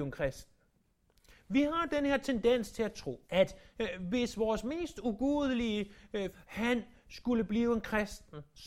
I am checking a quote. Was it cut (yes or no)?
yes